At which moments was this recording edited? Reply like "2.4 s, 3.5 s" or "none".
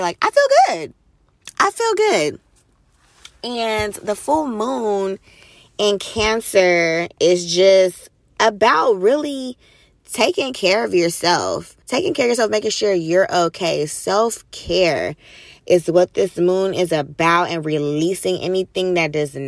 11.8 s